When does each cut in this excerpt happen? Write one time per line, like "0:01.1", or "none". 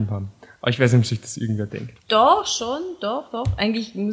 0:02.0